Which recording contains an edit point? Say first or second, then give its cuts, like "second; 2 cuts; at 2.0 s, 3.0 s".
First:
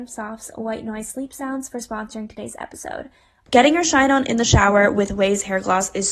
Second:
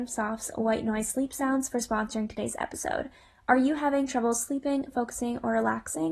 first; 1 cut; at 3.5 s